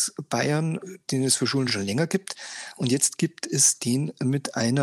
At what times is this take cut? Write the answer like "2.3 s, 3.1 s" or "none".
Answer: none